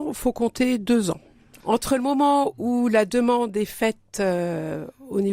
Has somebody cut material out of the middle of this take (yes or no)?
no